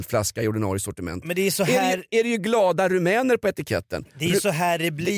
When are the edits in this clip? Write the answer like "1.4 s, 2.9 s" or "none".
none